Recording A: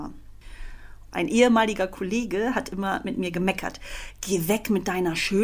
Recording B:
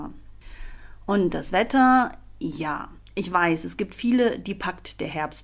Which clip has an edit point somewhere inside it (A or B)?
A